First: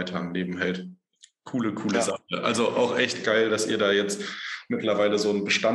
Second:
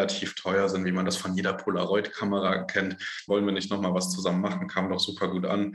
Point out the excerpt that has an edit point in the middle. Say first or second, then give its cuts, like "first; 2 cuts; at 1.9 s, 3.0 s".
second; 1 cut; at 3.3 s